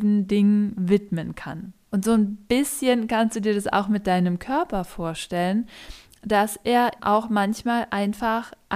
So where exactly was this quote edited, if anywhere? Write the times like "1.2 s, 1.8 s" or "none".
1.9 s, 7.0 s